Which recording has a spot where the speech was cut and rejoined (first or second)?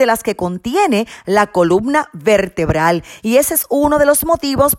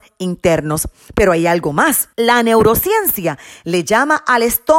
second